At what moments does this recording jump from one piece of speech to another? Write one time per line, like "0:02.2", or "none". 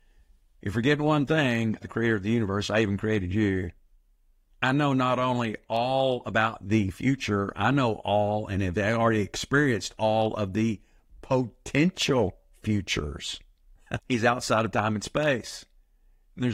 0:01.8
0:14.0